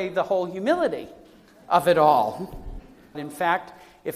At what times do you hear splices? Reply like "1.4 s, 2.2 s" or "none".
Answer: 3.1 s